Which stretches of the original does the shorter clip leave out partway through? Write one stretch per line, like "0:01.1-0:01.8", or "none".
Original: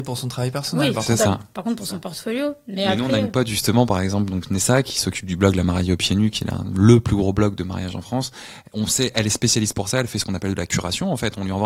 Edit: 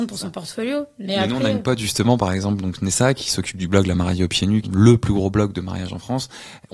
0:06.3-0:06.7